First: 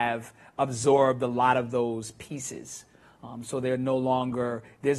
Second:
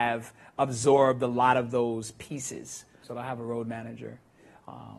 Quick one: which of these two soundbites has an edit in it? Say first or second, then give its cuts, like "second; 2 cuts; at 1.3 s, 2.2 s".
second; 1 cut; at 3.0 s